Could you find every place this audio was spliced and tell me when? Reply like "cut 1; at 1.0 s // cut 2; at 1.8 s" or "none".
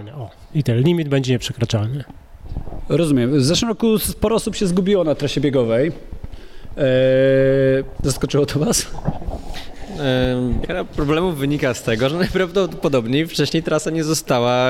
cut 1; at 10.6 s